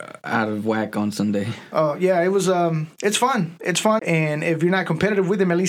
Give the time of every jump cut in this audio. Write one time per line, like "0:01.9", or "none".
0:04.0